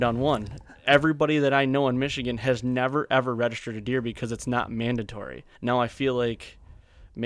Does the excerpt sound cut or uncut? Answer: cut